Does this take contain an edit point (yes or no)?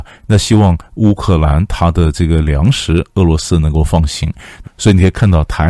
yes